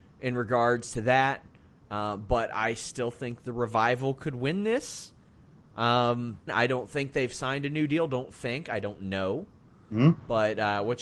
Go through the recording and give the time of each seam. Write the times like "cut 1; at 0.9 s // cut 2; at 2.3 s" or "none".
cut 1; at 6.5 s